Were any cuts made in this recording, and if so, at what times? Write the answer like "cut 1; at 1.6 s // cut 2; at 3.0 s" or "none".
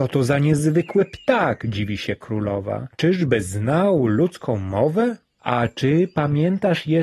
cut 1; at 5.4 s